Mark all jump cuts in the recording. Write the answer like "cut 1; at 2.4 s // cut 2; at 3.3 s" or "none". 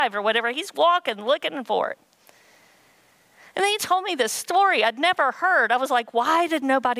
none

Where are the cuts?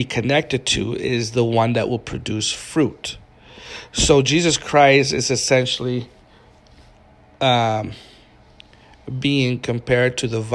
none

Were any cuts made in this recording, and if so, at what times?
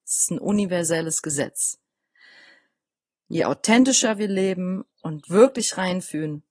cut 1; at 4.9 s

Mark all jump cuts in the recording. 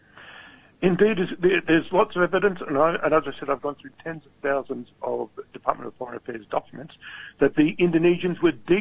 cut 1; at 5.5 s

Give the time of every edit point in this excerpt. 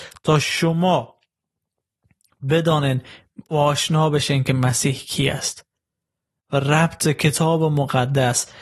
none

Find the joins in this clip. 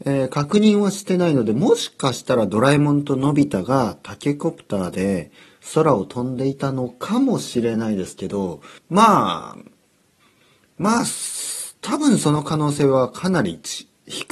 cut 1; at 8.8 s

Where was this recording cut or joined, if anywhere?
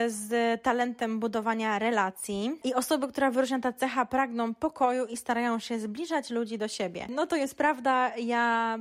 none

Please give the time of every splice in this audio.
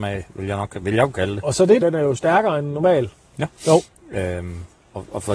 cut 1; at 1.8 s // cut 2; at 3.6 s

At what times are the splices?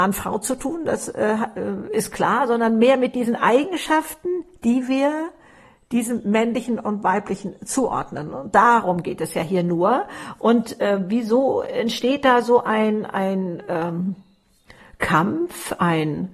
none

